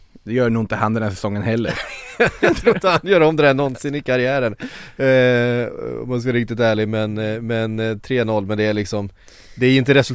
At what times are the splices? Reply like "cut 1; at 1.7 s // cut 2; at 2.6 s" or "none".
none